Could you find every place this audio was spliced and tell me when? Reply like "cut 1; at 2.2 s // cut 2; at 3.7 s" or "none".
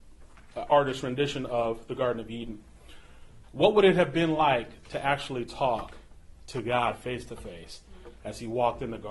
cut 1; at 3.4 s